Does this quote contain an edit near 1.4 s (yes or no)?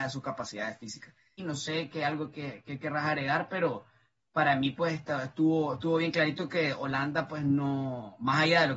yes